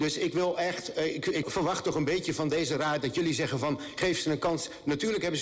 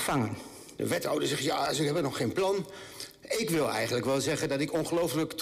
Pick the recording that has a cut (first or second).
first